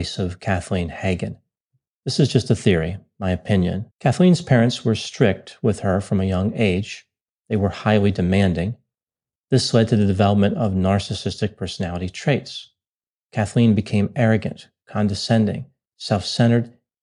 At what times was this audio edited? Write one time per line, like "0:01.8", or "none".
0:03.9